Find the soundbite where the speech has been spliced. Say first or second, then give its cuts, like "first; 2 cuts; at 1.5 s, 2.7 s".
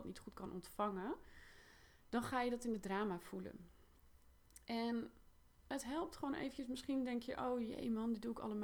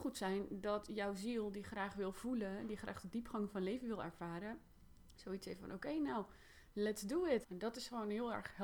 second; 1 cut; at 7.4 s